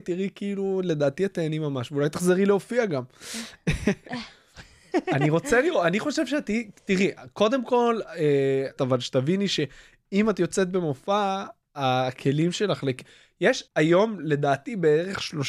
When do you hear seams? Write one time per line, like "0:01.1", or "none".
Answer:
0:08.8
0:13.7